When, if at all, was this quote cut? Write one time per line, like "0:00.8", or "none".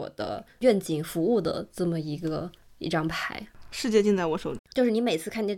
0:04.6